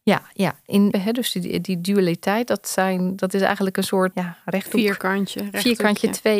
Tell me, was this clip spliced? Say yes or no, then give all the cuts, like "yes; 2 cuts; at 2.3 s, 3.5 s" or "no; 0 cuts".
yes; 2 cuts; at 0.9 s, 4.1 s